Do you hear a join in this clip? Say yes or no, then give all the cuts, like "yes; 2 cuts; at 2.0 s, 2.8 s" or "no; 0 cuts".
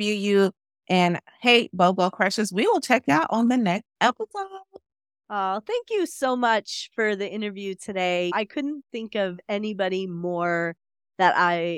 no; 0 cuts